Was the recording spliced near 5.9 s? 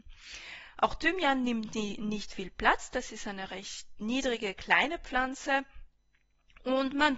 no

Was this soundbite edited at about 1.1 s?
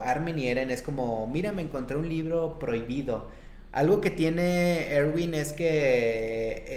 no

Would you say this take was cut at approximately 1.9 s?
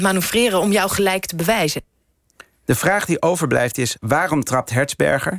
no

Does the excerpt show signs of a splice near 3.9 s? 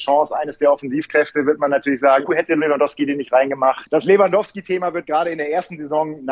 no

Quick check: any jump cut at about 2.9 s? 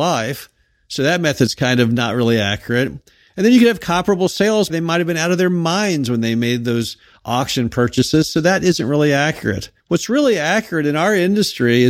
no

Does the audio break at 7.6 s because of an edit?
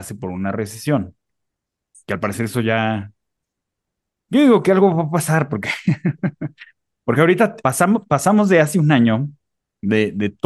yes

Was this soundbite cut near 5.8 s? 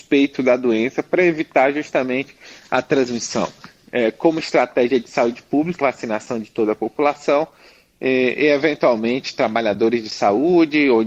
yes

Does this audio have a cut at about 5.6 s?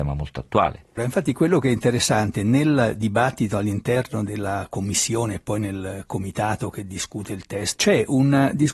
no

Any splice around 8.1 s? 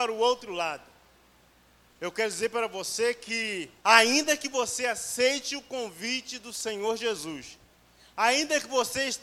no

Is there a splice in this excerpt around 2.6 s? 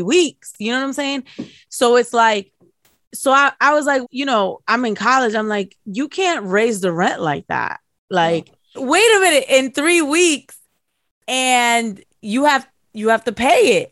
no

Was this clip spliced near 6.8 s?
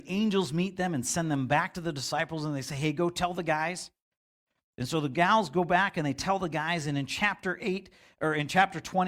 no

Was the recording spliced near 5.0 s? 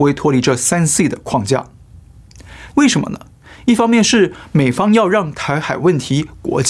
no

